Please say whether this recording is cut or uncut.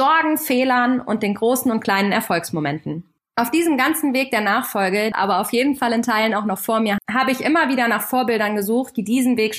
cut